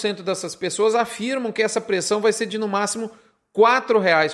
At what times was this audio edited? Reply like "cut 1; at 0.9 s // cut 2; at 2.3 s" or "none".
none